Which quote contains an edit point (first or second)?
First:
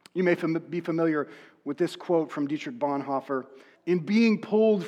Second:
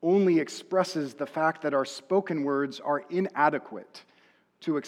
first